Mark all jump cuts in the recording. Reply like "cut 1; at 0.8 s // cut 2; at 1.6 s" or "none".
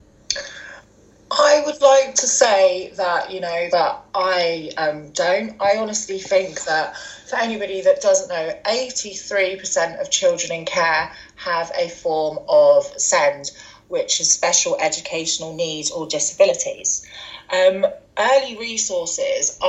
cut 1; at 3.7 s